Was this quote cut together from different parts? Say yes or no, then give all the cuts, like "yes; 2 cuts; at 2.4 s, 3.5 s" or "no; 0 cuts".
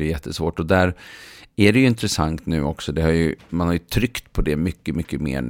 yes; 1 cut; at 3.5 s